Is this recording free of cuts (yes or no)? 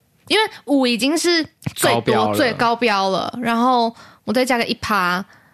yes